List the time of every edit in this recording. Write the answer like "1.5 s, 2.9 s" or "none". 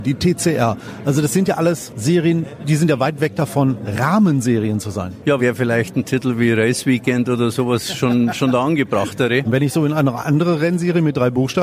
5.4 s, 9.4 s